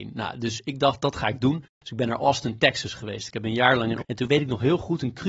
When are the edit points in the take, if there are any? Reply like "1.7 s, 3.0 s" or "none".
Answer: 4.0 s